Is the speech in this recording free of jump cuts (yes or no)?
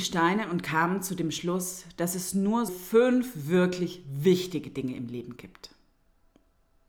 no